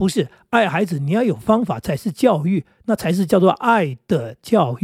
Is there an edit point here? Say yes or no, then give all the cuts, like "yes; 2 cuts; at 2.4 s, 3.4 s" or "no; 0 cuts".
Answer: no; 0 cuts